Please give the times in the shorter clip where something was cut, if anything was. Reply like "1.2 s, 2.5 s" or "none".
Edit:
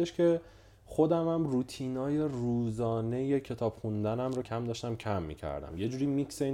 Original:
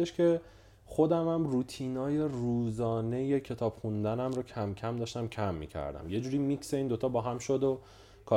4.4 s